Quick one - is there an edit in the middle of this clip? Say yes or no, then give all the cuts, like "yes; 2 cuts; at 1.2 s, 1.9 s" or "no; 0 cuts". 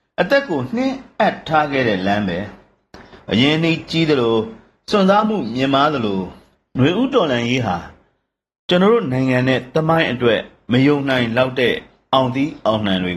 no; 0 cuts